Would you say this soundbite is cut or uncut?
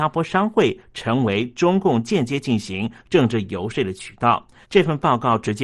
cut